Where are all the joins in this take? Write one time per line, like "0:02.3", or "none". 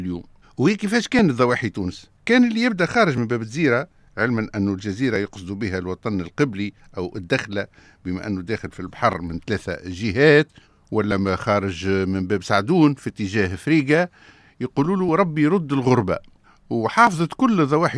none